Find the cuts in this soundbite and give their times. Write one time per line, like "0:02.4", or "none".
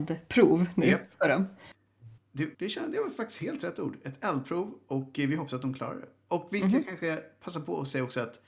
0:02.5